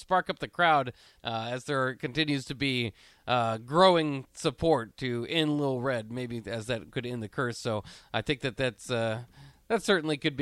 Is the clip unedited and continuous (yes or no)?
no